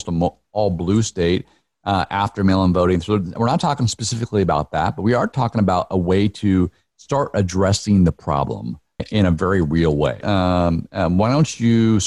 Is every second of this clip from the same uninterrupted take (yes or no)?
no